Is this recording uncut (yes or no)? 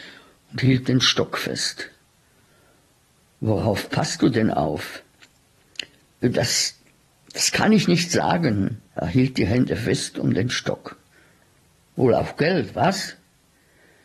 no